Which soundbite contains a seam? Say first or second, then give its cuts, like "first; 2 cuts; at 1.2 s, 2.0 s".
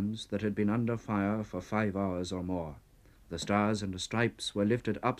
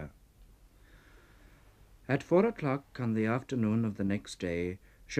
first; 1 cut; at 3.2 s